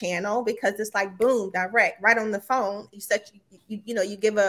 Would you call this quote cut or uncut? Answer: cut